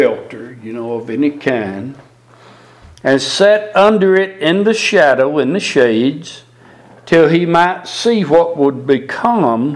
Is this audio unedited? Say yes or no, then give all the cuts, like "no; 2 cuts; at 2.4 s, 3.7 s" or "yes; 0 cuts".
yes; 0 cuts